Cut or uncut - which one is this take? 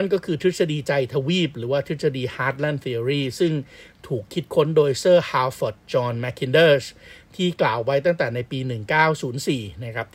uncut